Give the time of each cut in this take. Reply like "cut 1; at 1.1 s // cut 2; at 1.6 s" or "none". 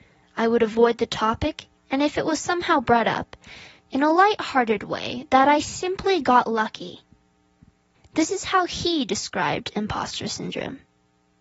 cut 1; at 3.8 s // cut 2; at 7.9 s